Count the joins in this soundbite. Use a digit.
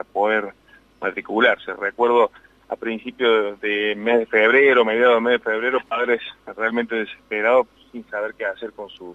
0